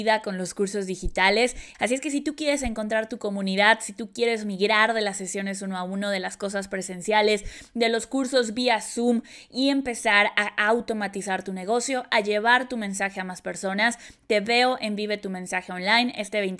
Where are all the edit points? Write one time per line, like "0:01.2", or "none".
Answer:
0:01.7